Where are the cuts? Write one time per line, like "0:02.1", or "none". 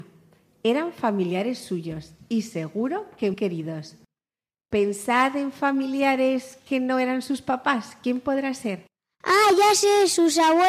0:03.3